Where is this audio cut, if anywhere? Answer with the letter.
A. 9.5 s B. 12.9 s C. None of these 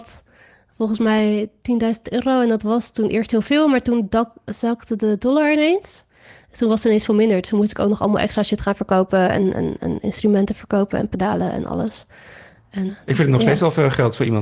B